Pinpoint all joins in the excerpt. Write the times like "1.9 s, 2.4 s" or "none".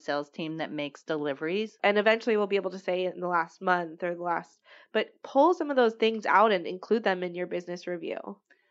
1.8 s